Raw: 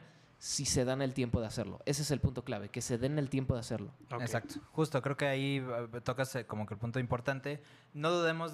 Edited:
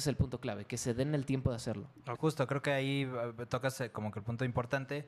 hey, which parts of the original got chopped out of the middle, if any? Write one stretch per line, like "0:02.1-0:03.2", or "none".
0:04.2-0:04.7